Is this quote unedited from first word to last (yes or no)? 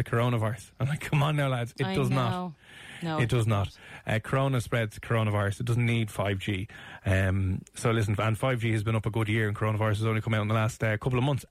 yes